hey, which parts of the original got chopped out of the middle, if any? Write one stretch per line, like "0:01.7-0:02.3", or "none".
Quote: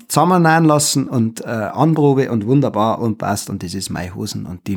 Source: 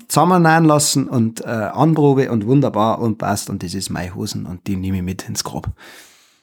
none